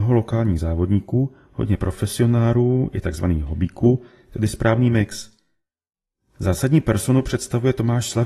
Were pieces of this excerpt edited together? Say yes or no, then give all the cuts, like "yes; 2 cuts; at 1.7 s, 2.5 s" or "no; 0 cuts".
no; 0 cuts